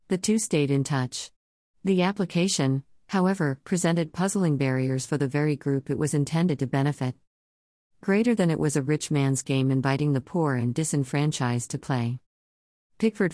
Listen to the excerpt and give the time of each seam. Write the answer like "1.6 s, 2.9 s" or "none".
1.6 s